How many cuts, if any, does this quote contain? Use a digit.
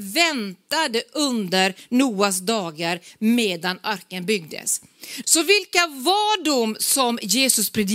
1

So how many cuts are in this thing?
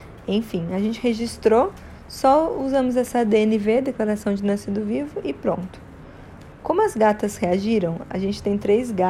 0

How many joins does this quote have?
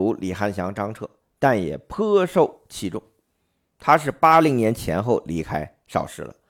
0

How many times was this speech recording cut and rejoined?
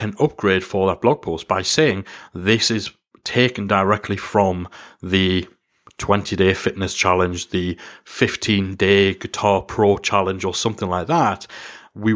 0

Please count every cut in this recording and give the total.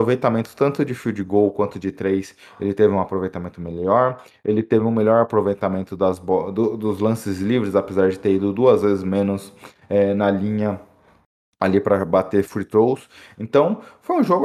0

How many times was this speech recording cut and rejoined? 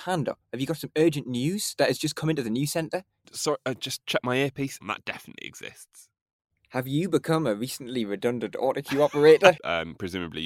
2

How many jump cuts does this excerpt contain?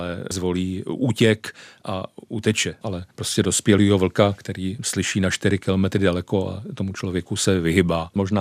1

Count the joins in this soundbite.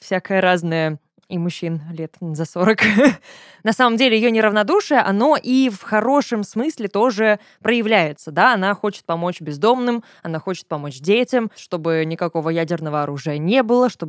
1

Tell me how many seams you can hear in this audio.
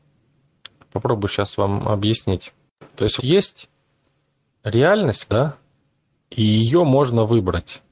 2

